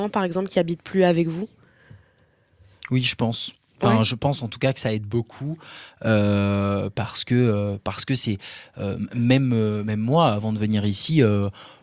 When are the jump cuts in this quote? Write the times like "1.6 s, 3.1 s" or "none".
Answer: none